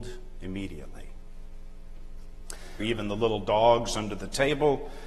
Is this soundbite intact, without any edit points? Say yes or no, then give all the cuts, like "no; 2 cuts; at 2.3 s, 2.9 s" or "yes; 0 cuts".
no; 1 cut; at 2.8 s